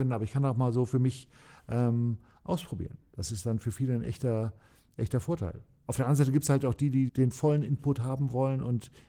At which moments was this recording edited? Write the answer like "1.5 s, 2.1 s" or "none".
7.1 s